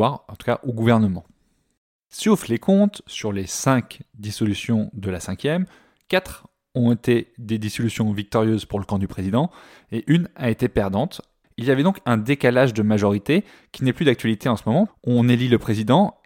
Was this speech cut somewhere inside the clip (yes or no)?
yes